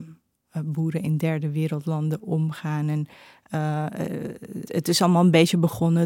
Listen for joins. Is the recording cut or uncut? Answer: cut